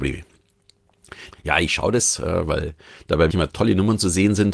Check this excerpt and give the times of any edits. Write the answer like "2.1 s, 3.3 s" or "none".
1.3 s, 3.3 s